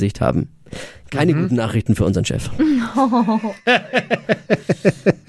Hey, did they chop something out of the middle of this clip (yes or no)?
no